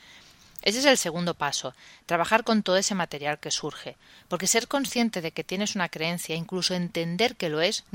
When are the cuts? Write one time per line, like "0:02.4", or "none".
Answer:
none